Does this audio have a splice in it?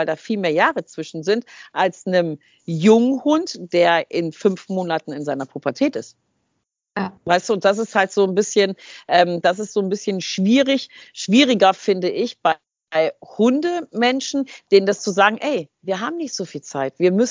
yes; 1 cut; at 7.2 s

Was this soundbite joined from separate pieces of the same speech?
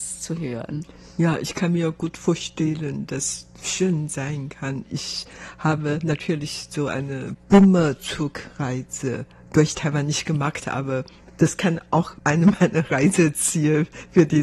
no; 0 cuts

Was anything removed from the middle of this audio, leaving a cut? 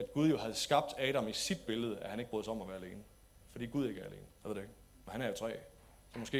yes; 1 cut; at 4.3 s

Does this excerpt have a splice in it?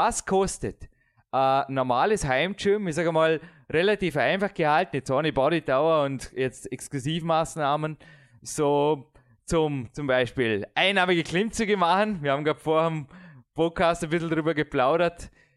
no; 0 cuts

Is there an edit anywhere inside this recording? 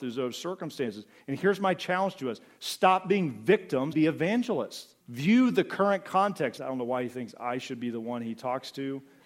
yes; 3 cuts; at 3.9 s, 5.0 s, 6.6 s

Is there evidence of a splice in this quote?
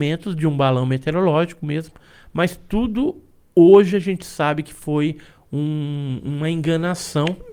no; 0 cuts

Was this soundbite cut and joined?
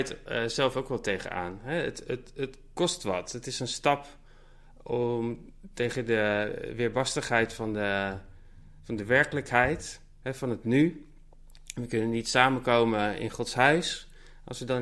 no; 0 cuts

